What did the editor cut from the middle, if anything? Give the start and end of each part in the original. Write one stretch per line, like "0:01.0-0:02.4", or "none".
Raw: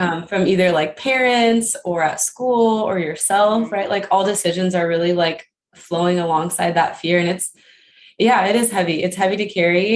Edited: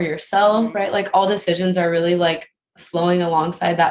none